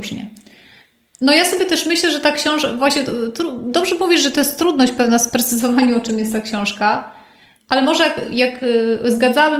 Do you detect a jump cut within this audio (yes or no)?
no